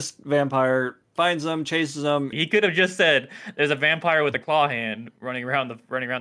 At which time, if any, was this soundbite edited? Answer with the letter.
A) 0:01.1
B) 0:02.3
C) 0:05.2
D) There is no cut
B